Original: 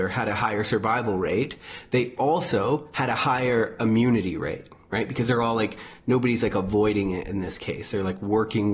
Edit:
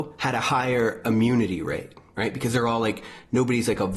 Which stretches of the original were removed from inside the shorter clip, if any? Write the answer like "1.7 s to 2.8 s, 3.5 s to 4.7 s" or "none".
none